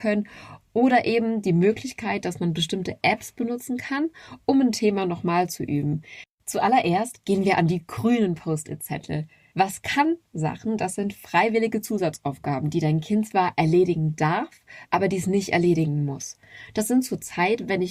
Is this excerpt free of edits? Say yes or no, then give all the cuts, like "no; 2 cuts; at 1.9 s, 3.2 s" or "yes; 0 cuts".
no; 3 cuts; at 6.2 s, 9.5 s, 14.9 s